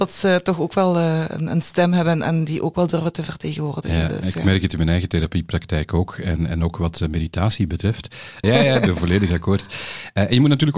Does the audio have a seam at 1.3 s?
no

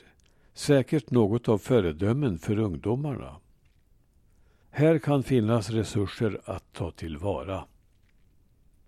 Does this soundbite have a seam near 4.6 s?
yes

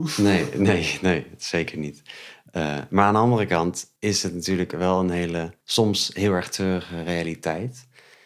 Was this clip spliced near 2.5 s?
no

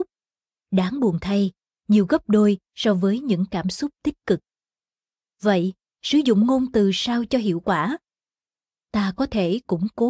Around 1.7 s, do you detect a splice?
yes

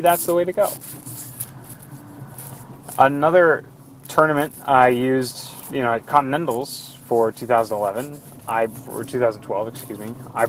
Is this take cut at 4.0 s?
no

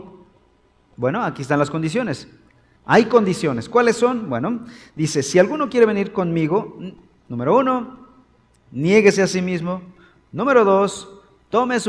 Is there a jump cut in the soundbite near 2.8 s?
yes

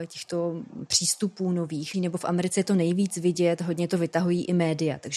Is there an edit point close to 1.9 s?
yes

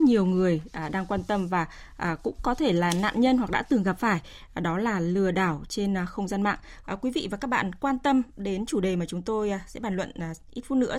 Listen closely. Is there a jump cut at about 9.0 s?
no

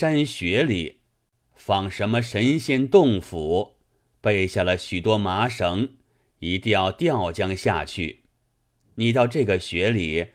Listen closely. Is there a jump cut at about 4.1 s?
no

